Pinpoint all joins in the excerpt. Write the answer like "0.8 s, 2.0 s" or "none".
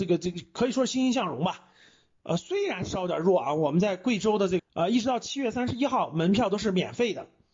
2.2 s, 4.6 s